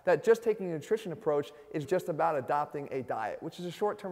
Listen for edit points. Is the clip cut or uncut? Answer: cut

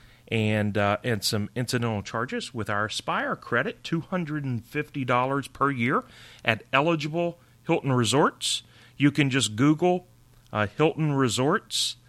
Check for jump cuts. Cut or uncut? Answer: uncut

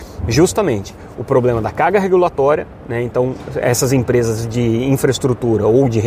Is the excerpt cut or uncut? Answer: uncut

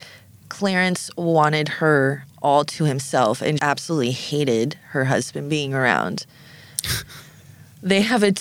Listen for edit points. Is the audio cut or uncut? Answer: cut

